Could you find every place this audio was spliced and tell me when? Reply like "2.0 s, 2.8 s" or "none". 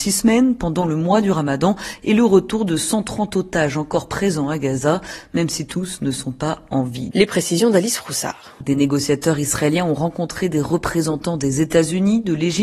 7.1 s, 8.6 s